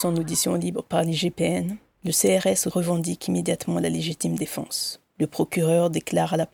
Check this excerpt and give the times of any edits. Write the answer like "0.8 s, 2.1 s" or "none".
2.7 s